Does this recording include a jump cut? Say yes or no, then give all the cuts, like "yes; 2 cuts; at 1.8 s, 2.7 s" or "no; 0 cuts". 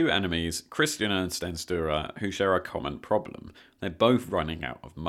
no; 0 cuts